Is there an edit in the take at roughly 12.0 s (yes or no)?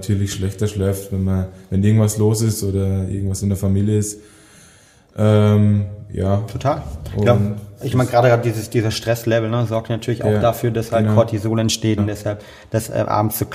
yes